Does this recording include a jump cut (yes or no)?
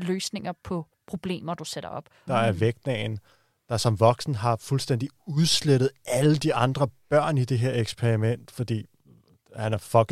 yes